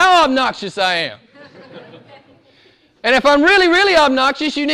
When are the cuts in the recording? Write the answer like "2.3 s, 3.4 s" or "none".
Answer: none